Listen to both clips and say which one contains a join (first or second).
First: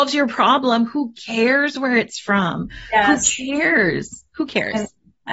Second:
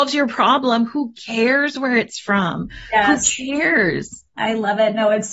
second